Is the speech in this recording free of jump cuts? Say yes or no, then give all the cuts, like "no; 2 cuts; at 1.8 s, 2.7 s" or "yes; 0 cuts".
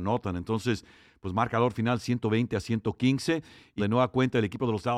no; 1 cut; at 3.8 s